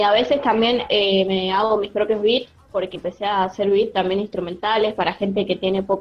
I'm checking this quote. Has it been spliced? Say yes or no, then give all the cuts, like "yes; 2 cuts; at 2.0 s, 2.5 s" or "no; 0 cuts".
yes; 1 cut; at 2.9 s